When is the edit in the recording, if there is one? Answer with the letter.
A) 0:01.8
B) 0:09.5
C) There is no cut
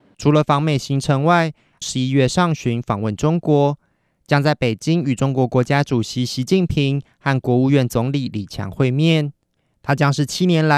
A